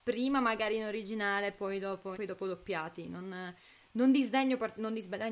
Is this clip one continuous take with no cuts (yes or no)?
no